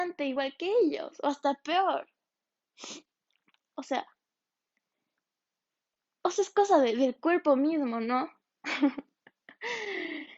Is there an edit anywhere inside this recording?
yes; 1 cut; at 3.7 s

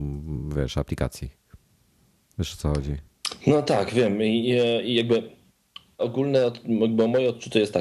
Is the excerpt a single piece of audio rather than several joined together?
no; 1 cut; at 6.0 s

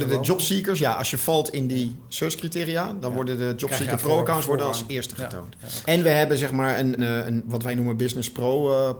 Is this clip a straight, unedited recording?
no; 2 cuts; at 5.8 s, 7.0 s

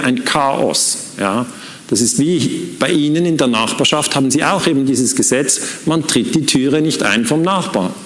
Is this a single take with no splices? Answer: yes; 0 cuts

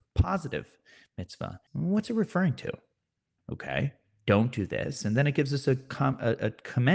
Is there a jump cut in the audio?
yes; 2 cuts; at 1.7 s, 3.4 s

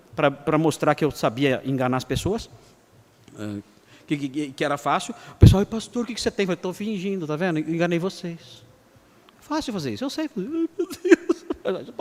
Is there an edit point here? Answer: no; 0 cuts

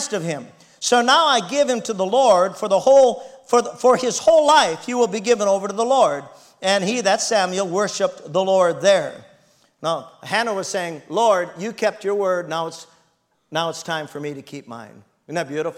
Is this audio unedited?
yes; 0 cuts

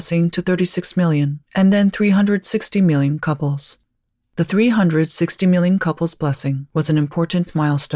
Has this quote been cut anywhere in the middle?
no; 0 cuts

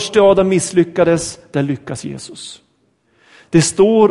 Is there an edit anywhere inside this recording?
no; 0 cuts

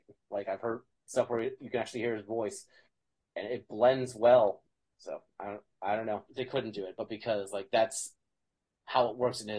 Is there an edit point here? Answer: yes; 1 cut; at 6.3 s

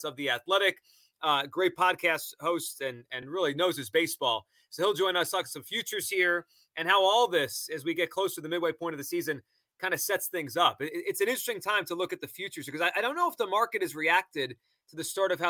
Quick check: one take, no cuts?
yes; 0 cuts

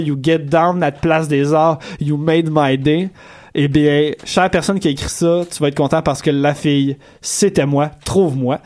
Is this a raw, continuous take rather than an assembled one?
yes; 0 cuts

